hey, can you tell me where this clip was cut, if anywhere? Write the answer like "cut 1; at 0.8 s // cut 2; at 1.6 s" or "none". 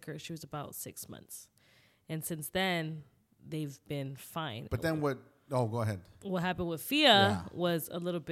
none